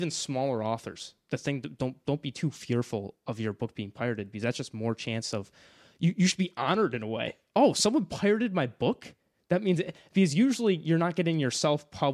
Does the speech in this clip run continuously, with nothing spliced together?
yes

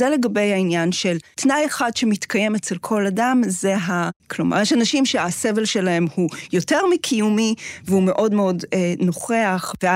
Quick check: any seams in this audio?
yes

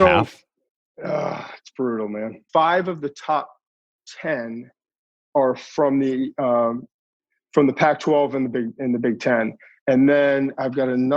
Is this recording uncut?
no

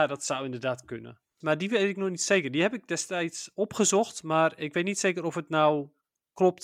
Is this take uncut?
no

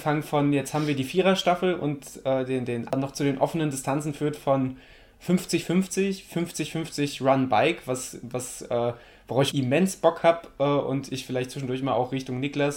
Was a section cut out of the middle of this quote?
yes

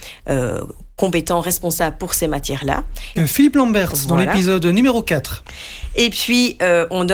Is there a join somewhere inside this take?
yes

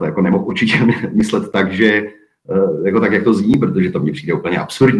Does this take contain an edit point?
no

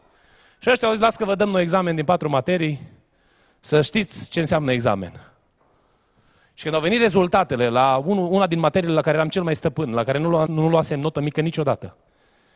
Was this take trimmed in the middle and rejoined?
yes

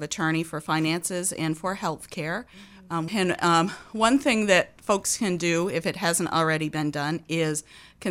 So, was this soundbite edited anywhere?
yes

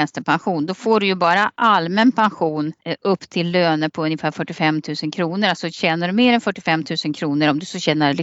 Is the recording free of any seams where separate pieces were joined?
yes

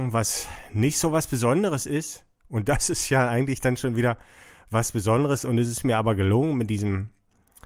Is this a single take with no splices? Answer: yes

